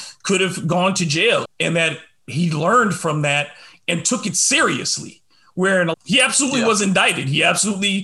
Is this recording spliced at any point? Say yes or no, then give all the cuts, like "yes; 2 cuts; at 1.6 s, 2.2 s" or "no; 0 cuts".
yes; 2 cuts; at 1.4 s, 5.9 s